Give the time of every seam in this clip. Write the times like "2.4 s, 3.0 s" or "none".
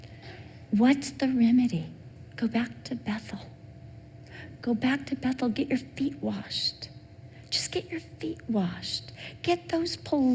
2.3 s